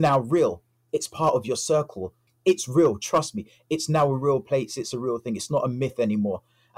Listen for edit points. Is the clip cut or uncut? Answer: cut